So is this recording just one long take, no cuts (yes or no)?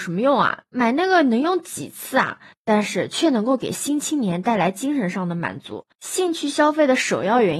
no